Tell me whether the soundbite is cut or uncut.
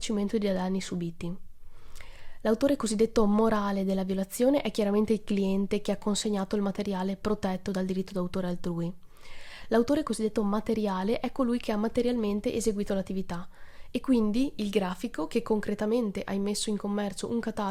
uncut